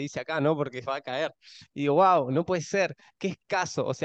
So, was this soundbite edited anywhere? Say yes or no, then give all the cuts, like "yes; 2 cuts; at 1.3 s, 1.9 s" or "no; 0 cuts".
yes; 1 cut; at 1.6 s